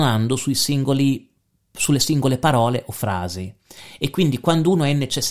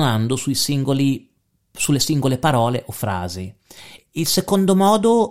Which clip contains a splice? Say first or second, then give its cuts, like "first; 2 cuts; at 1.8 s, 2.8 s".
second; 1 cut; at 4.0 s